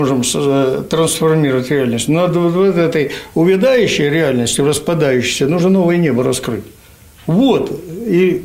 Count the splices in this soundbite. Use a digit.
0